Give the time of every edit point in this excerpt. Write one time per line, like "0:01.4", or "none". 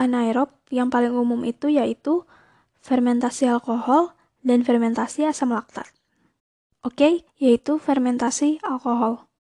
0:07.3